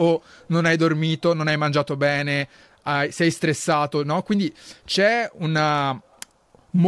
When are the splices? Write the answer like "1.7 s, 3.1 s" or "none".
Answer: none